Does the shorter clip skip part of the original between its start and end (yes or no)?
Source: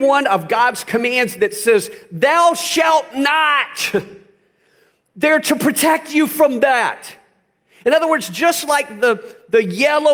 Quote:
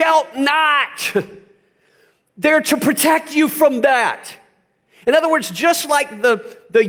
no